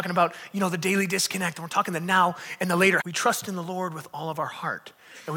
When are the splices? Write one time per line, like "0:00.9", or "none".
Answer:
0:03.0